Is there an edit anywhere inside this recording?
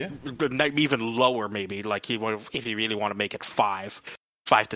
no; 0 cuts

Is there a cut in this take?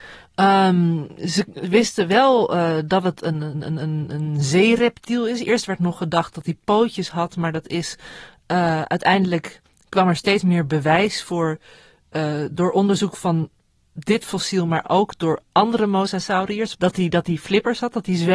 yes; 1 cut; at 16.7 s

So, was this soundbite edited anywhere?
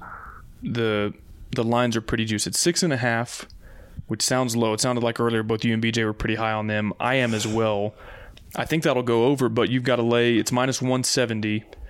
no; 0 cuts

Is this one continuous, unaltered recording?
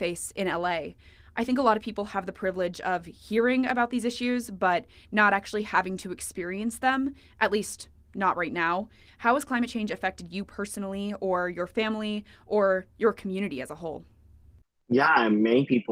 no; 1 cut; at 9.1 s

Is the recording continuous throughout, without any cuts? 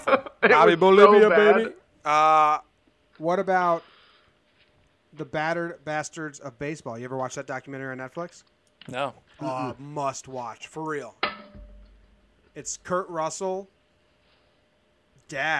yes; 0 cuts

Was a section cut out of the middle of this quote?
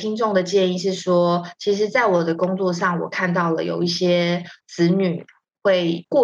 no; 0 cuts

